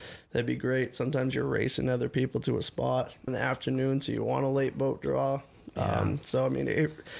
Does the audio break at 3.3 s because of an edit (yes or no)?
yes